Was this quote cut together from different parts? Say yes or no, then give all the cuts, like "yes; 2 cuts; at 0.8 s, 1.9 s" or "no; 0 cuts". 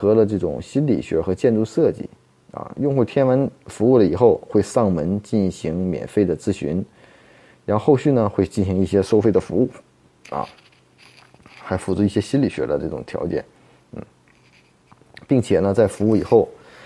no; 0 cuts